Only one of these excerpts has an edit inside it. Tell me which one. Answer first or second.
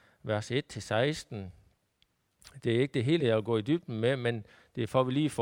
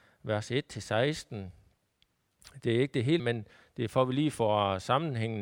second